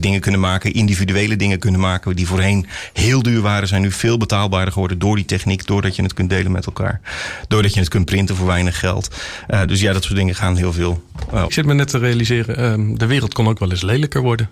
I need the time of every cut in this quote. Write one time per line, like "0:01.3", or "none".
0:11.5